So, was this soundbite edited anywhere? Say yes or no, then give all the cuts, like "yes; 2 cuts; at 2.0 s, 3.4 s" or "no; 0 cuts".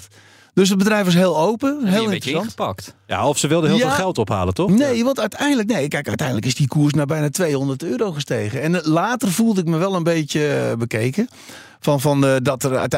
no; 0 cuts